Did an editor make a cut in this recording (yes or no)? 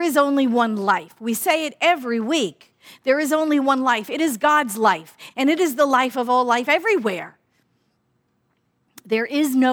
yes